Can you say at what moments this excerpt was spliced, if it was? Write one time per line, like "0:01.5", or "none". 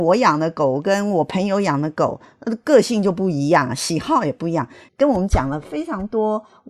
0:04.9